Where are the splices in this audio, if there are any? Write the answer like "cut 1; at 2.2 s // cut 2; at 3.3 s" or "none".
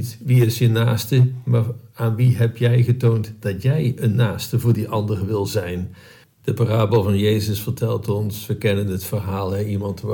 cut 1; at 6.2 s